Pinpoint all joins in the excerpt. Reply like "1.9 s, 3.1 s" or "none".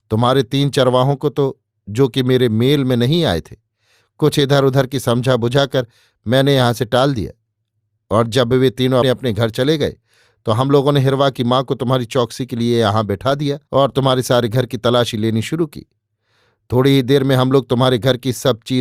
9.0 s, 13.7 s